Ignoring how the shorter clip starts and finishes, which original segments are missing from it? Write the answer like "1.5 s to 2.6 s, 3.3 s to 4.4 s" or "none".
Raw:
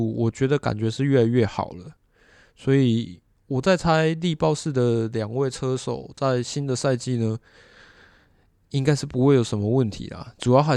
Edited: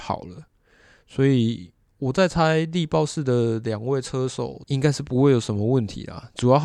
6.1 s to 8.7 s